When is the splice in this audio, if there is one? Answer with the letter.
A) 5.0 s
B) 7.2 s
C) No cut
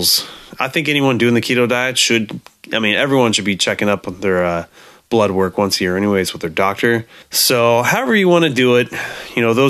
B